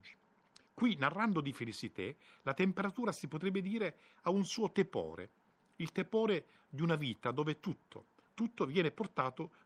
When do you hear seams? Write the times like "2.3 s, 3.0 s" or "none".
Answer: 8.3 s

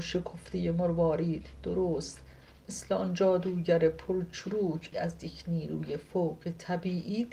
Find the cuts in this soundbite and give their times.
4.9 s

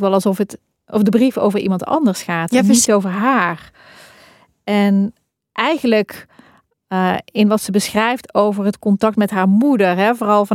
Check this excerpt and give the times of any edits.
2.8 s

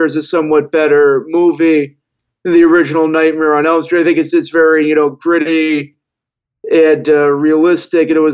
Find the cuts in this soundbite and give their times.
4.3 s

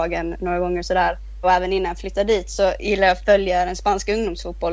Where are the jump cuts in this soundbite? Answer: 1.4 s

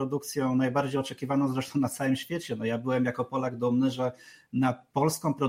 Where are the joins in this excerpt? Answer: none

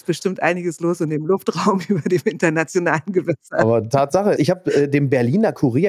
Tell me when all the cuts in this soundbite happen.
4.4 s

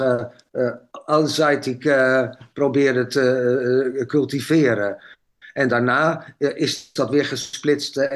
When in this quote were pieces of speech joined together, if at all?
none

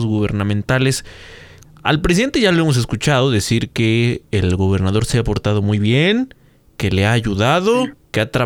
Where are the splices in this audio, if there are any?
1.6 s

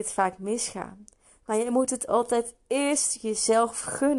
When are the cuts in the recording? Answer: 1.4 s

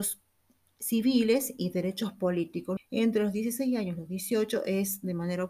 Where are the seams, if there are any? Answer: 2.8 s

